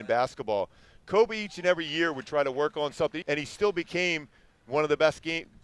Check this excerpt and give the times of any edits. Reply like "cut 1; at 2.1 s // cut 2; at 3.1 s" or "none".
cut 1; at 3.2 s

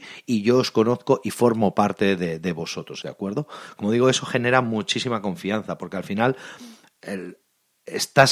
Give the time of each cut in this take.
cut 1; at 3.0 s

